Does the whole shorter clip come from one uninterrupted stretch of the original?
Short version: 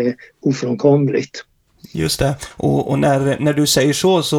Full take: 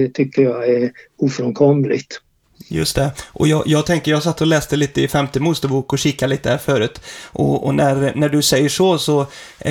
no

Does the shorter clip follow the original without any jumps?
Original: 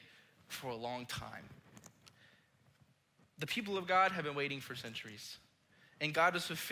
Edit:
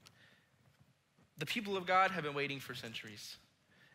yes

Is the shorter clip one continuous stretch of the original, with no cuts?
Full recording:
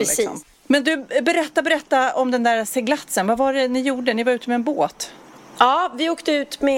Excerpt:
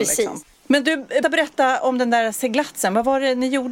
no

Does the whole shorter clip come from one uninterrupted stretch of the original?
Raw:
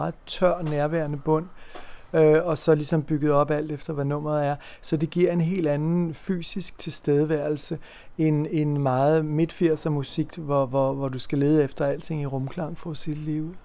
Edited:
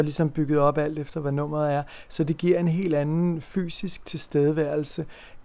yes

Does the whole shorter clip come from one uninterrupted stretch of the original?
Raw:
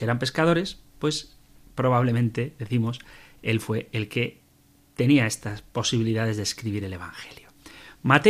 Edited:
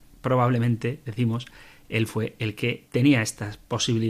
no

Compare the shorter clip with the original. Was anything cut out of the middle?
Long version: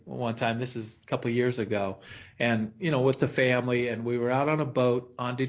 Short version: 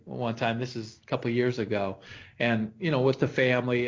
no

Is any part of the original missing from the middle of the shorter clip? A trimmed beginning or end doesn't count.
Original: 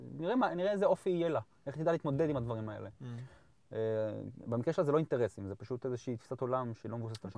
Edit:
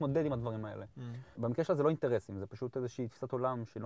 yes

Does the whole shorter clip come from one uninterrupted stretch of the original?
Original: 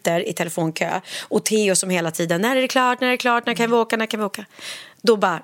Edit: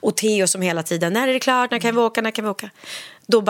no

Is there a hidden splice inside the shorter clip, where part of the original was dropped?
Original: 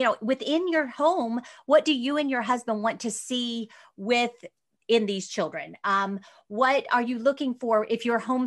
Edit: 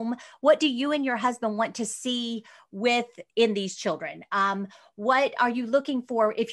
yes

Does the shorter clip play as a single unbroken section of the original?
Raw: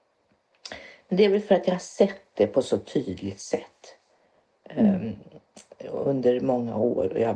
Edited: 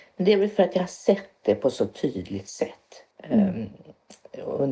no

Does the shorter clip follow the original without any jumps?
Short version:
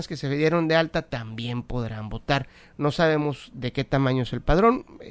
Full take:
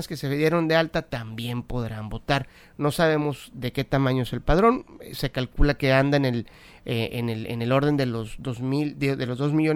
yes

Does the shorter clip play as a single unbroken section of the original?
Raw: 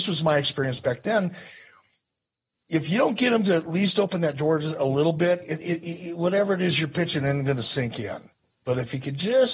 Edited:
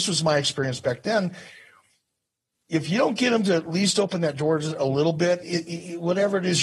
no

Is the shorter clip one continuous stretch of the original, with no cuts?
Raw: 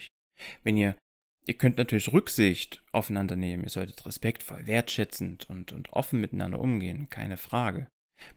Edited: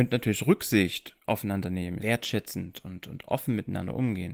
no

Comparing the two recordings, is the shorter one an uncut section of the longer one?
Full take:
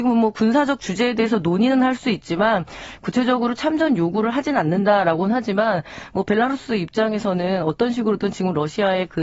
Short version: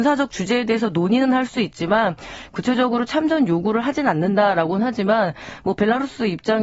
yes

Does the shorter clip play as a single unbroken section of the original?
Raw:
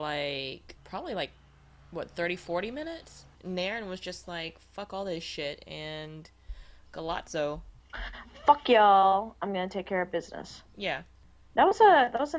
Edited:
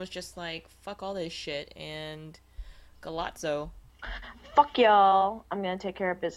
yes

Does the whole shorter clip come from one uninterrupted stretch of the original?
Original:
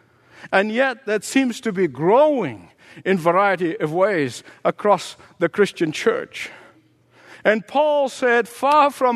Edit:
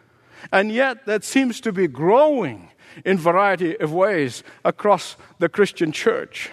yes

